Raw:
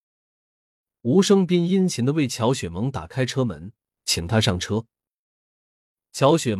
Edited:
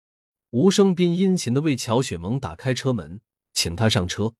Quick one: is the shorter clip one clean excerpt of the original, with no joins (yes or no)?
yes